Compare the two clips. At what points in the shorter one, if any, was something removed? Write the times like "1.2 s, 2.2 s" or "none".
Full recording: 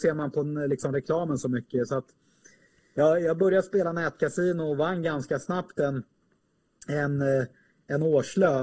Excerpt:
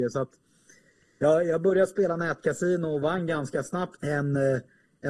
4.0 s

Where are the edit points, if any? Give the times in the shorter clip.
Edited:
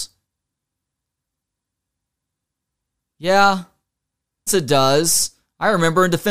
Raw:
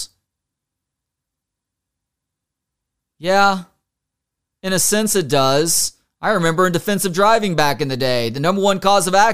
4.5 s

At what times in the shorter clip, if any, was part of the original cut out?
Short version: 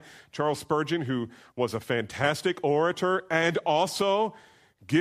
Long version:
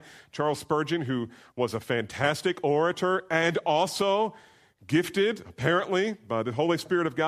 none

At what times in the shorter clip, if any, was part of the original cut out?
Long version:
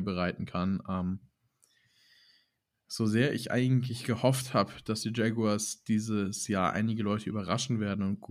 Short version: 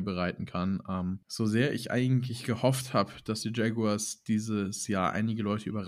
1.2 s

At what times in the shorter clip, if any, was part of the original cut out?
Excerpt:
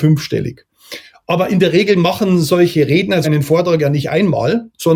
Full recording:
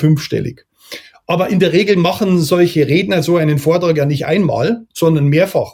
3.2 s

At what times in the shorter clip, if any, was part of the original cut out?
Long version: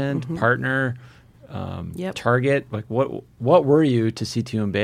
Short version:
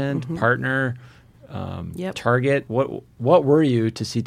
2.7 s

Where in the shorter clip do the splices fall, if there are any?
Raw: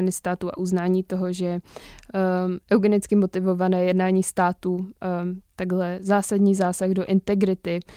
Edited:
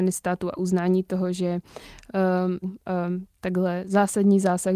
2.6 s

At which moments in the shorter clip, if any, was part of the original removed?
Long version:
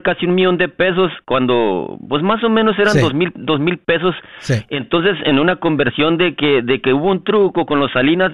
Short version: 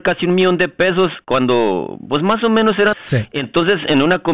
2.9 s

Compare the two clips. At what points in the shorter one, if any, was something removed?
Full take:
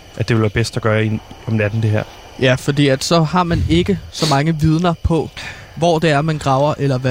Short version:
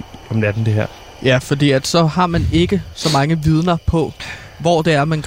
none

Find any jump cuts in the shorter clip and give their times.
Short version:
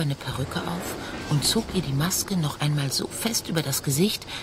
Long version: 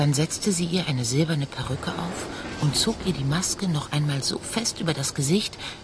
none

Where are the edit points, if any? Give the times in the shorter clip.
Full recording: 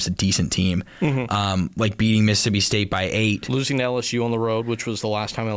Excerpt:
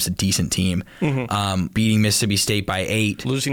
1.7 s

